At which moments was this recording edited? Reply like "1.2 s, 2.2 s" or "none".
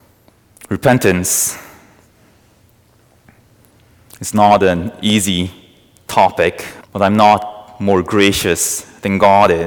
6.8 s